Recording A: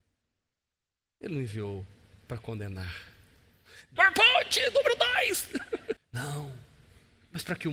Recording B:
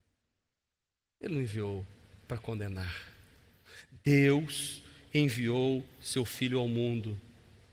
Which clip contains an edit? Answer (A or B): A